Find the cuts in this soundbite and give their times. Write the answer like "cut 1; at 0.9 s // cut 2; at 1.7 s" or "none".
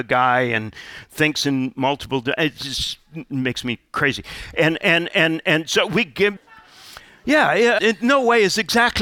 cut 1; at 6.4 s // cut 2; at 7.8 s